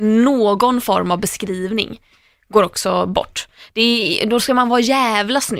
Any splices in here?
no; 0 cuts

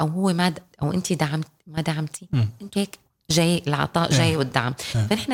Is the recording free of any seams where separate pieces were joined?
no; 1 cut; at 2.7 s

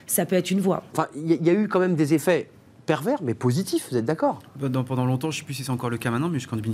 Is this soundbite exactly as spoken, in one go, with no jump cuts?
no; 1 cut; at 0.9 s

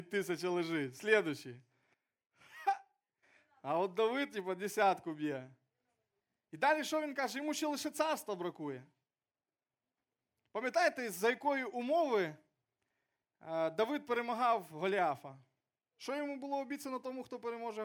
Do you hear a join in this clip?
no; 0 cuts

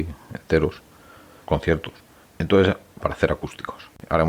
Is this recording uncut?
no; 2 cuts; at 1.4 s, 3.0 s

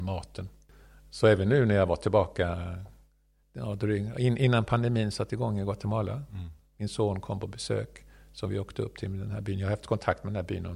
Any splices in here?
no; 0 cuts

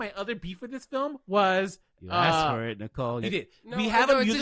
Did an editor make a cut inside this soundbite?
yes; 2 cuts; at 1.9 s, 3.2 s

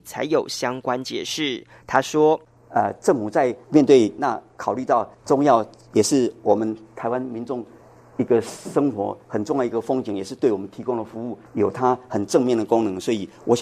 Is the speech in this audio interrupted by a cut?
yes; 2 cuts; at 4.2 s, 11.5 s

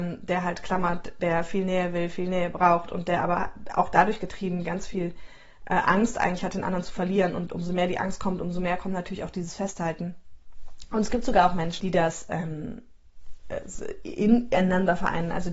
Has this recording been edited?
yes; 1 cut; at 11.8 s

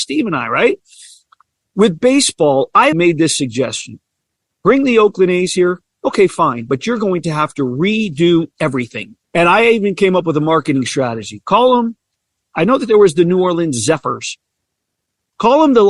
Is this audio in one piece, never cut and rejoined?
no; 2 cuts; at 2.9 s, 9.2 s

